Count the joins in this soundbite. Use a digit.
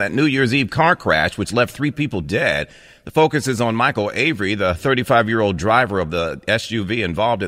0